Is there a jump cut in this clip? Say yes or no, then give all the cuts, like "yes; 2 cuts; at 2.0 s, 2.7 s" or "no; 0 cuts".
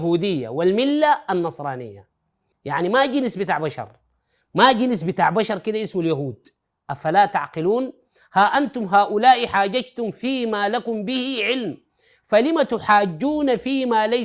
yes; 2 cuts; at 2.5 s, 6.7 s